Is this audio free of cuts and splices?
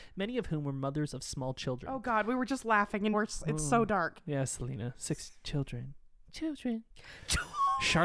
no; 1 cut; at 3.1 s

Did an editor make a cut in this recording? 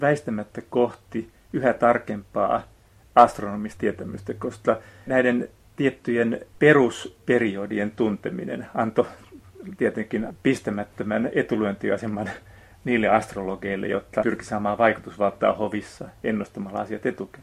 no; 0 cuts

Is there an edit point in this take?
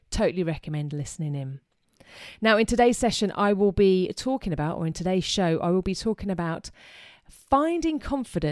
no; 0 cuts

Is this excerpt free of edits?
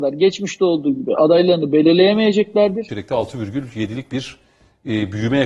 no; 1 cut; at 2.9 s

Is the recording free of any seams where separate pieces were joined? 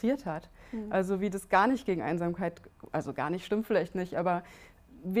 yes; 0 cuts

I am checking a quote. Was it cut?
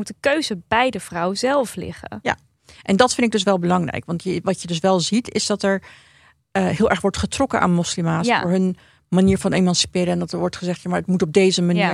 no; 0 cuts

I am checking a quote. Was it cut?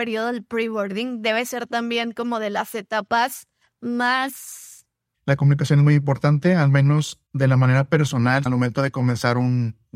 yes; 3 cuts; at 5.1 s, 7.3 s, 8.5 s

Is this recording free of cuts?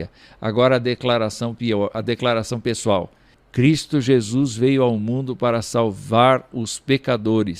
no; 2 cuts; at 1.9 s, 3.3 s

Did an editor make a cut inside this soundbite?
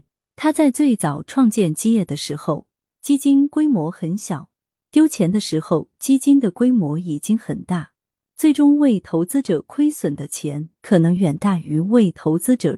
yes; 1 cut; at 11.2 s

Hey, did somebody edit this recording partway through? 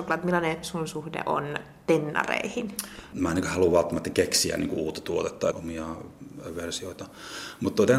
yes; 2 cuts; at 3.1 s, 5.5 s

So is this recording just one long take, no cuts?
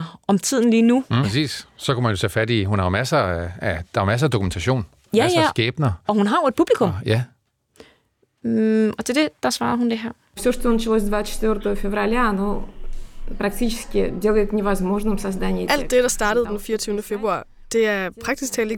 no; 1 cut; at 1.2 s

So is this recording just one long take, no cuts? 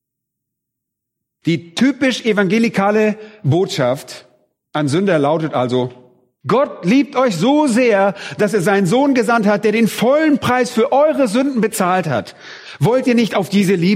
yes; 0 cuts

